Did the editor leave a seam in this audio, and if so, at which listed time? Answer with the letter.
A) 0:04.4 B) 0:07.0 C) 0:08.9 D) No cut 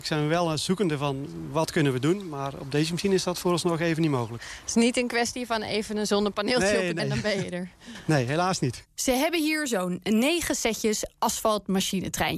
B